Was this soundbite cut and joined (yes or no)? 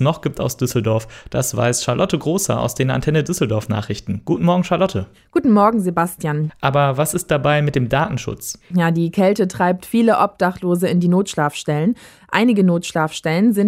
yes